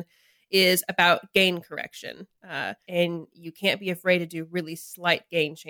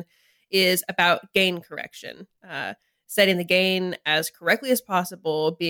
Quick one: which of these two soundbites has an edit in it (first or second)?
first